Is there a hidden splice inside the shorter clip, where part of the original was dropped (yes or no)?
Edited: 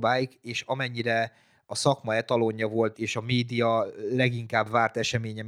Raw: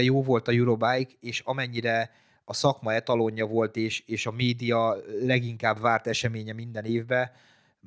yes